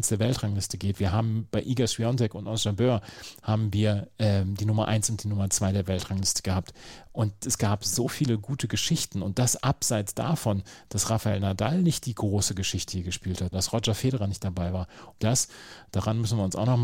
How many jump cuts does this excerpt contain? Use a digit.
2